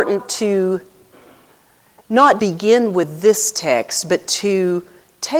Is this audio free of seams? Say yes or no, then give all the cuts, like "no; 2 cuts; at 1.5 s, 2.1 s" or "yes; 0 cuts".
no; 1 cut; at 2.4 s